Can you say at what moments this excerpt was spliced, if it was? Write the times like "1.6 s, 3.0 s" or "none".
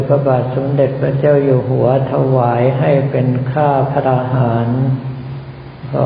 4.0 s